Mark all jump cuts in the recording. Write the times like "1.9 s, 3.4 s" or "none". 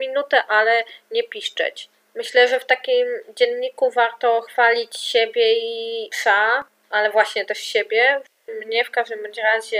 8.5 s